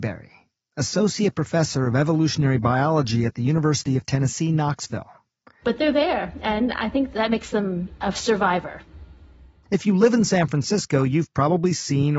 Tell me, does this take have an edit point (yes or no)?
yes